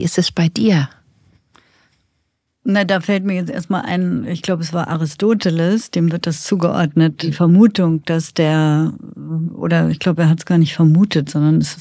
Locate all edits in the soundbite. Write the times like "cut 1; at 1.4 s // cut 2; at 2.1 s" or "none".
none